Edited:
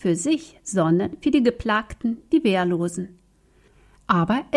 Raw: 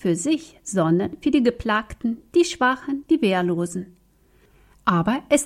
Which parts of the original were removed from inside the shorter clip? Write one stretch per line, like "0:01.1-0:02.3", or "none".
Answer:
0:02.3-0:03.0